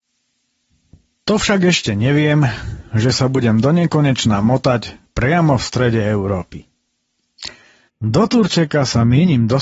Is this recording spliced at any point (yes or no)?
yes